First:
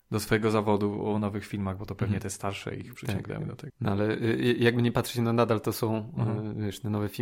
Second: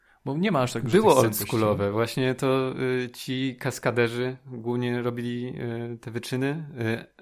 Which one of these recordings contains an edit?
first; 1 cut; at 3.7 s

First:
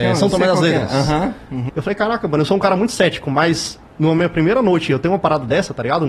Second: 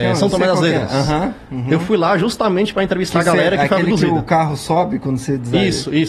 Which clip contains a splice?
first; 1 cut; at 1.7 s

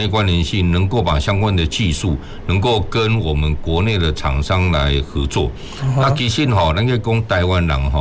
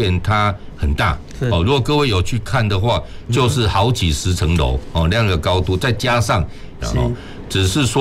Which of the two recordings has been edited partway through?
second; 2 cuts; at 3.3 s, 6.8 s

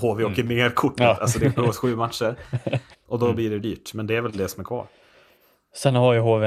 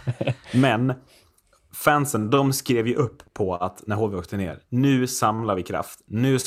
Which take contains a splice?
first; 1 cut; at 2.9 s

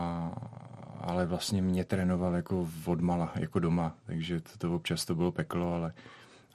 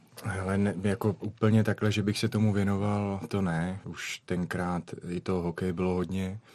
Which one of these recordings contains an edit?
second; 2 cuts; at 1.2 s, 3.8 s

